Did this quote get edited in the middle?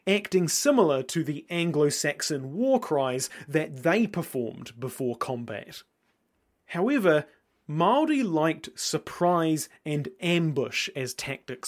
no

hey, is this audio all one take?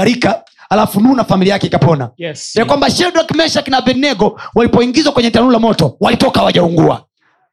no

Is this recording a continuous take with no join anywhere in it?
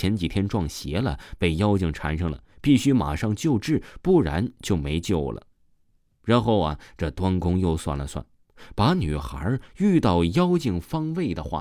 yes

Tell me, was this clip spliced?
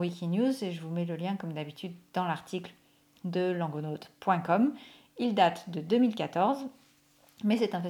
no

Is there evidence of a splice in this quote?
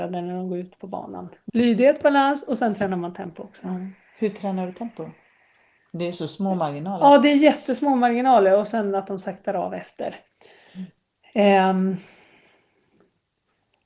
yes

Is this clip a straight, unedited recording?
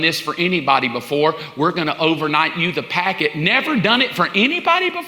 yes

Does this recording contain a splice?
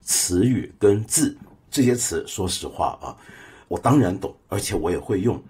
no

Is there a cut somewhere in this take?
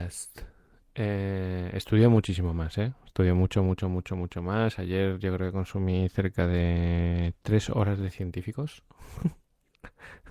no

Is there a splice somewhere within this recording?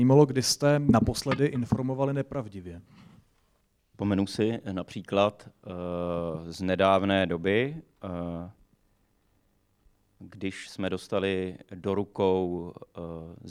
yes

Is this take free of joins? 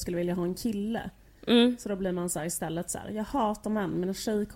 yes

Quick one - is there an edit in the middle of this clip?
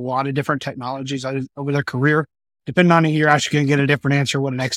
yes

